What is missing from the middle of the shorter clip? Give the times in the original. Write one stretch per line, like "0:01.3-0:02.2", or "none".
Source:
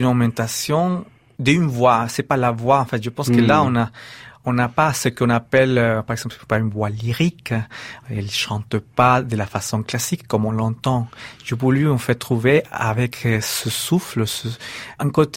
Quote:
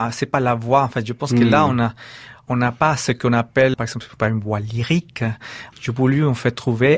0:05.7-0:06.0
0:08.0-0:11.4